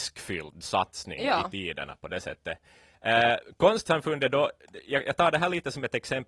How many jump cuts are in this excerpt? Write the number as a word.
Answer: zero